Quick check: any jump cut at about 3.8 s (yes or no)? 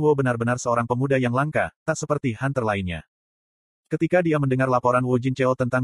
no